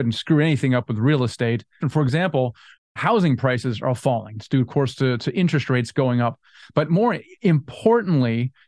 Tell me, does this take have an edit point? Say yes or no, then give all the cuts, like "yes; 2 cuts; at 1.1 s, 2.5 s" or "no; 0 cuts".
yes; 1 cut; at 1.8 s